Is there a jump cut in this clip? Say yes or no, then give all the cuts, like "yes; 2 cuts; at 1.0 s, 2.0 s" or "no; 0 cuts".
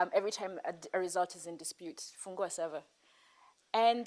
no; 0 cuts